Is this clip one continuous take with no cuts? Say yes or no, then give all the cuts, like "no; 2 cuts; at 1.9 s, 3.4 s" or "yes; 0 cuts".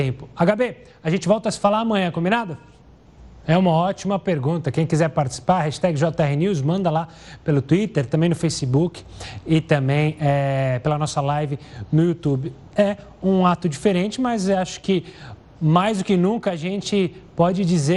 no; 1 cut; at 3.4 s